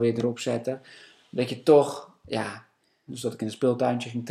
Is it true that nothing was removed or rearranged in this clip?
no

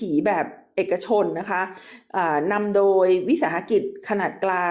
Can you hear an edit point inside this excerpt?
no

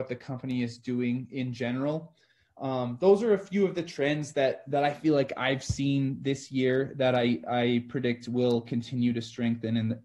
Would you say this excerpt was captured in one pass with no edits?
yes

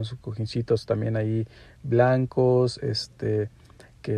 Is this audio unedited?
yes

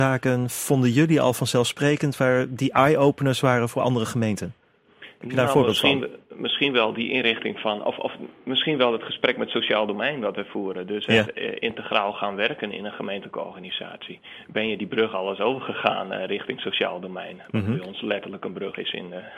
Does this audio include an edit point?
no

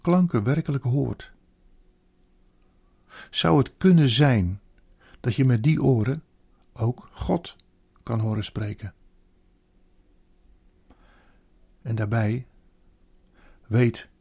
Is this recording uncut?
yes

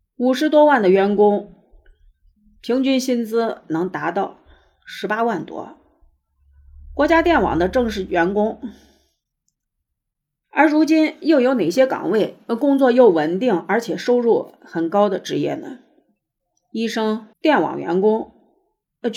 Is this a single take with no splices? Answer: no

